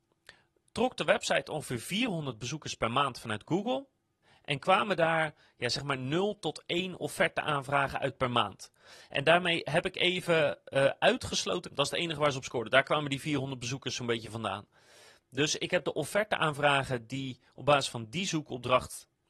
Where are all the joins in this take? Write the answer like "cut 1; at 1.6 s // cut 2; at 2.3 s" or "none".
cut 1; at 11.7 s